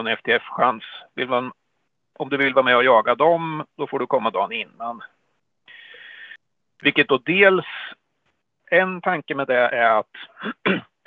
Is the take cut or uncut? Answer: cut